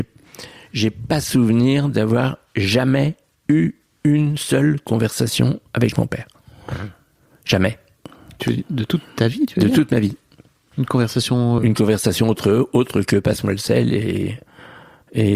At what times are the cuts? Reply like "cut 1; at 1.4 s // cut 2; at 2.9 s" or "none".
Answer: cut 1; at 11.6 s